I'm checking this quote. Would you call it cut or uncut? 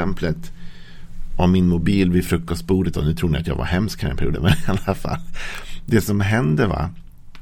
cut